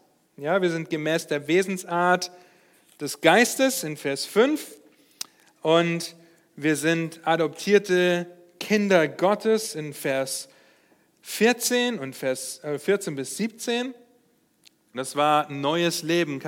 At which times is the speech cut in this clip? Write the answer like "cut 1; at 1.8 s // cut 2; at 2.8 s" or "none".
cut 1; at 14.9 s